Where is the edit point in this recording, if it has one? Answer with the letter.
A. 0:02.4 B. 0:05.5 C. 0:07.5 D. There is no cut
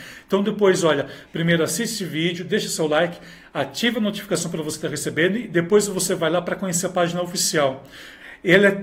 D